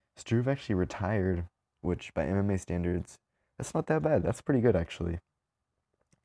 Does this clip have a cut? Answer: yes; 1 cut; at 1.6 s

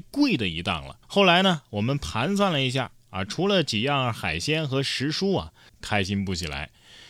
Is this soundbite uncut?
no; 2 cuts; at 1.0 s, 5.7 s

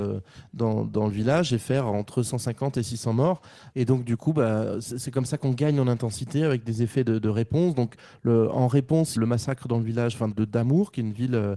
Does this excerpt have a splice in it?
yes; 3 cuts; at 3.7 s, 9.2 s, 10.3 s

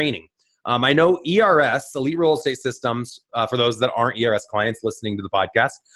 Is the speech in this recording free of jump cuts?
yes; 0 cuts

